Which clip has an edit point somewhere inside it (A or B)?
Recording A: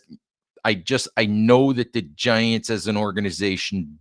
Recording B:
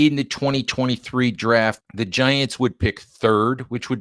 B